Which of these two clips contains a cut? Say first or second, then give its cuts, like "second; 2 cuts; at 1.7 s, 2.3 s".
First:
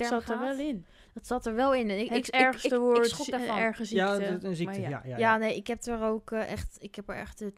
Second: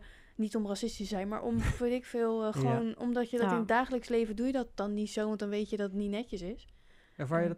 second; 1 cut; at 1.8 s